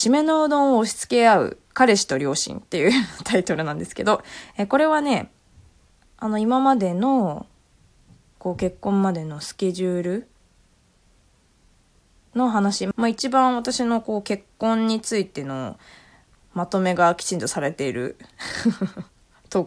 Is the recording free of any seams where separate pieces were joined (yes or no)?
no